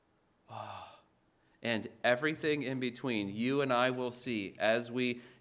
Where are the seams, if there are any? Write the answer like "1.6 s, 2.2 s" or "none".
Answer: none